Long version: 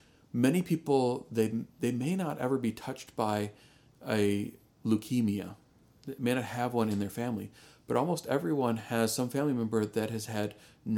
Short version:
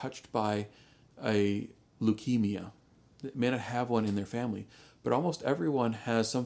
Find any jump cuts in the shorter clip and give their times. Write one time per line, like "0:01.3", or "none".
none